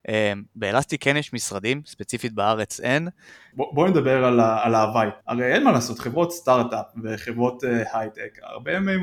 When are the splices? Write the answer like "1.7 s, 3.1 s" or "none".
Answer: 3.5 s, 5.2 s